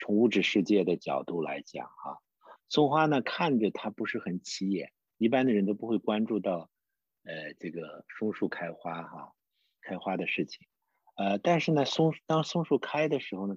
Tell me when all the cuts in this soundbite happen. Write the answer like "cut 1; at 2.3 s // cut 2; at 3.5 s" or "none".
cut 1; at 2.6 s